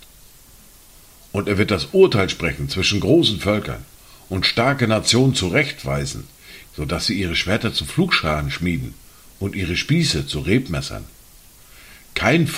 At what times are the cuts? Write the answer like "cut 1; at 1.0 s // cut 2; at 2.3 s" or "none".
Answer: cut 1; at 6.6 s